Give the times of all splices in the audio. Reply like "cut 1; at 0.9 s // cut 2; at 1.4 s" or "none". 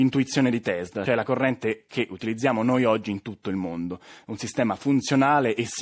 cut 1; at 1.1 s

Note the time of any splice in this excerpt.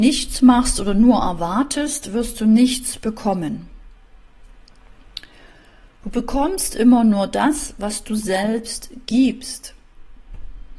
cut 1; at 6.0 s

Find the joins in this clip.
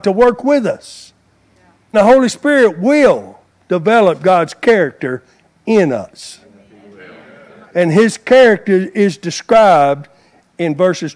cut 1; at 1.9 s // cut 2; at 7.6 s

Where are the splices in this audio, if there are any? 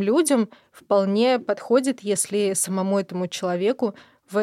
none

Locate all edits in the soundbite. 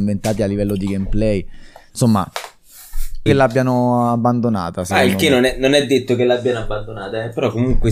cut 1; at 3.3 s

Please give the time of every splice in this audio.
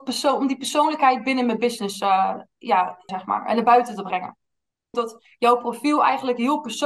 cut 1; at 3.1 s // cut 2; at 4.9 s

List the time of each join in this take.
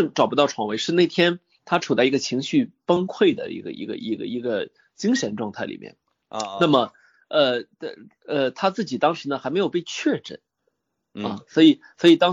none

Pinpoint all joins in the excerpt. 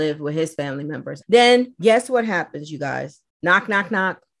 cut 1; at 1.2 s

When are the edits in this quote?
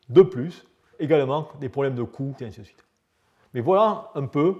cut 1; at 0.9 s // cut 2; at 2.4 s

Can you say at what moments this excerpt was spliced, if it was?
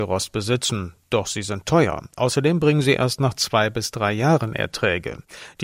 none

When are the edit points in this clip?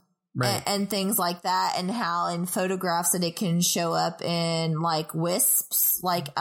none

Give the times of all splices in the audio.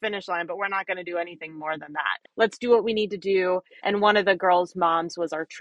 cut 1; at 2.2 s // cut 2; at 3.8 s

